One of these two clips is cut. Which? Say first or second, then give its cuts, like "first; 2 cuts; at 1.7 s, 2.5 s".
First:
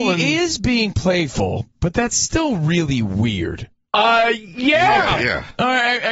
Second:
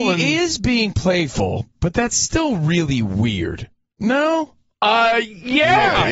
first; 1 cut; at 3.9 s